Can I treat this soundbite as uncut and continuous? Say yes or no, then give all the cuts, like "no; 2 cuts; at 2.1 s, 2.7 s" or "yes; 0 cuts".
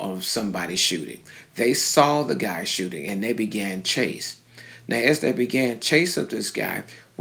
yes; 0 cuts